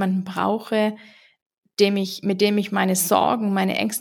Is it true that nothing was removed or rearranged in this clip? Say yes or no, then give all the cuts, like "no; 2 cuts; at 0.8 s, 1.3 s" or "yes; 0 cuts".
yes; 0 cuts